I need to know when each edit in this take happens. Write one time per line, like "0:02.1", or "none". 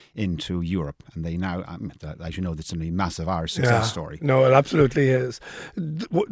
none

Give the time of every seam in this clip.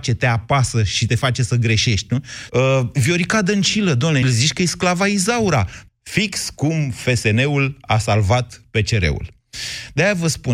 0:02.5
0:04.2
0:05.9

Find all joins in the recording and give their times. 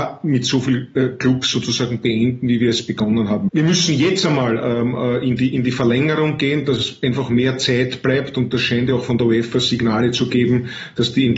0:03.5

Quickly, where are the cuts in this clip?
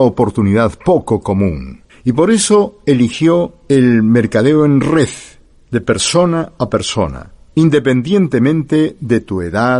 0:01.9

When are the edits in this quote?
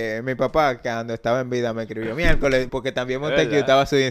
0:02.7

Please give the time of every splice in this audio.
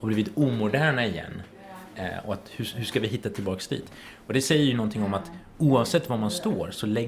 none

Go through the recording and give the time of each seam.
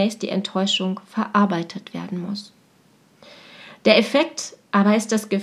none

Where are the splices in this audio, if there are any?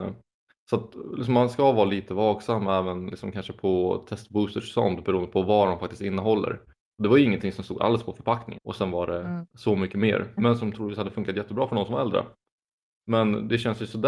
0:08.6
0:10.4

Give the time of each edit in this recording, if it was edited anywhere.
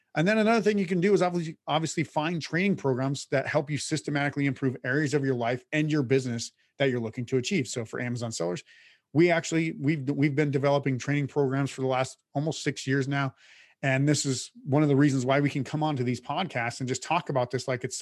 none

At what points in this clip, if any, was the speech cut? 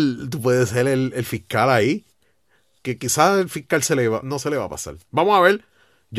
0:02.8
0:04.2

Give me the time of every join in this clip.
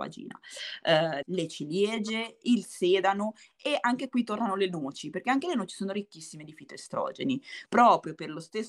0:01.2
0:07.7

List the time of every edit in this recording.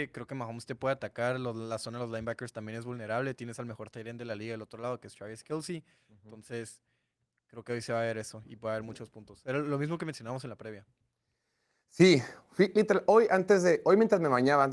none

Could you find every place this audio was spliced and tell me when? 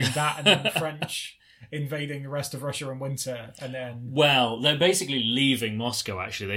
none

